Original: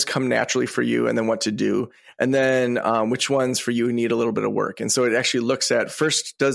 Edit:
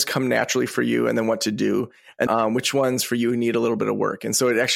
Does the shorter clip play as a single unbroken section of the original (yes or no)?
no